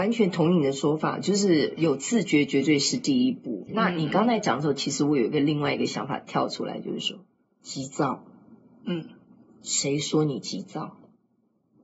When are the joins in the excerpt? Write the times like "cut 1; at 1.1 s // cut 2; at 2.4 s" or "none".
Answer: none